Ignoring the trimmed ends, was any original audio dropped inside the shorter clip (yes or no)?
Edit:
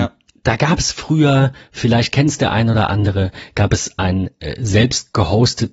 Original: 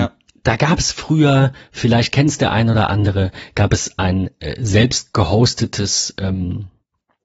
no